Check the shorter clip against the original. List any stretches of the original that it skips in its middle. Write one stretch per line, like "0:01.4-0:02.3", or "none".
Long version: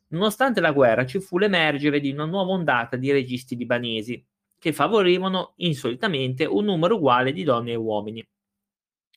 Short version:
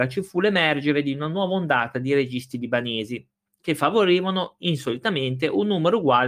none